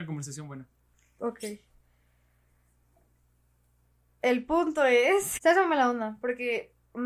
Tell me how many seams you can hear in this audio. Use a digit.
1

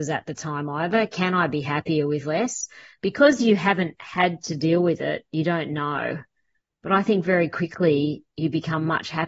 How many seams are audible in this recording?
0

